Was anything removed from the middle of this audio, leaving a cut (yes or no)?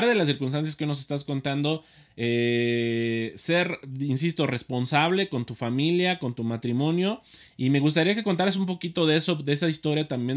no